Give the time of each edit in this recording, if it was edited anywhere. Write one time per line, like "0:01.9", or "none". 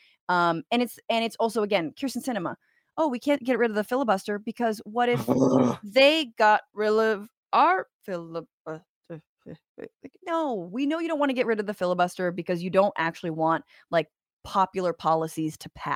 none